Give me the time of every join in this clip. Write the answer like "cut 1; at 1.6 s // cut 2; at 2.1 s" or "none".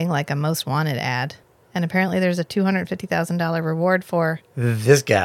none

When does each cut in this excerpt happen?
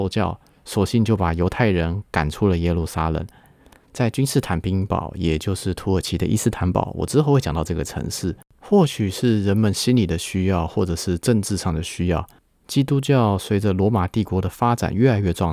cut 1; at 3.9 s // cut 2; at 8.5 s

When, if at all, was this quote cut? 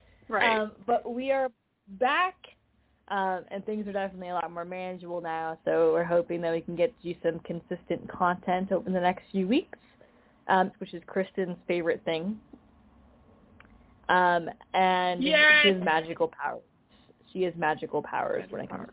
cut 1; at 10.7 s

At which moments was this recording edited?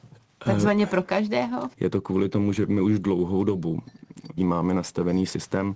cut 1; at 1.7 s // cut 2; at 4.4 s

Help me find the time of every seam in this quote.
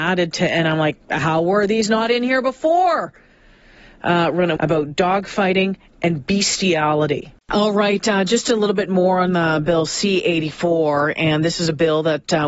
cut 1; at 4.6 s // cut 2; at 7.4 s

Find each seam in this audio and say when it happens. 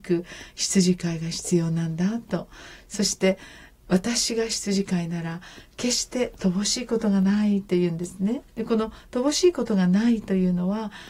cut 1; at 8.5 s

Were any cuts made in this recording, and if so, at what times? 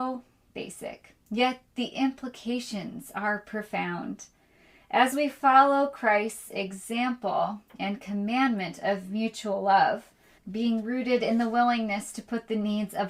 cut 1; at 10.4 s

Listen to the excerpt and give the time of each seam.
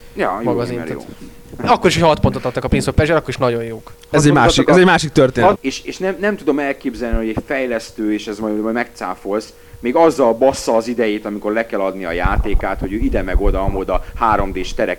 cut 1; at 5.5 s

